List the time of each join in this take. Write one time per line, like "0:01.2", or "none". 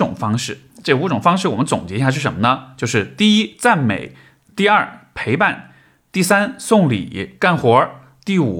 0:07.4